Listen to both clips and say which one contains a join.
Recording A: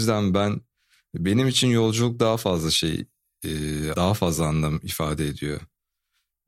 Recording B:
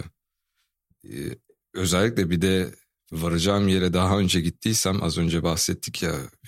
A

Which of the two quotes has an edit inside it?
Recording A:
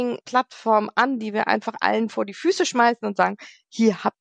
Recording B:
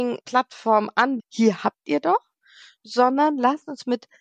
B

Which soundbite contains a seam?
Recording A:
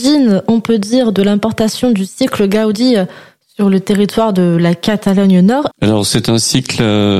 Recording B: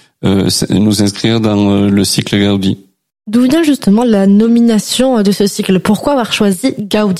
A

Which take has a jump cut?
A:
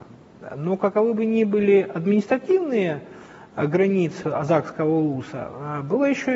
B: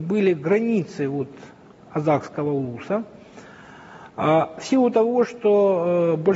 A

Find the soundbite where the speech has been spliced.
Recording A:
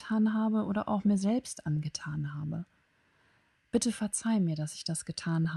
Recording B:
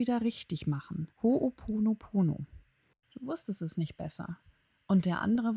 B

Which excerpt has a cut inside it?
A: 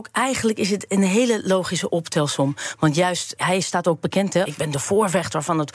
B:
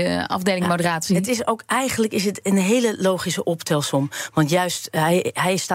A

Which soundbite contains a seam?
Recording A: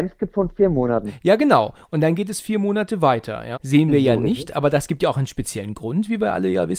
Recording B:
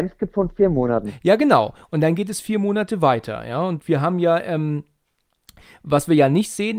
A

